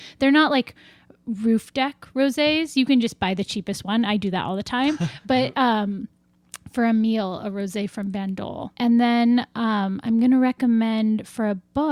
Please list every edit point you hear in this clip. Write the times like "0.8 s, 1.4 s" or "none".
8.7 s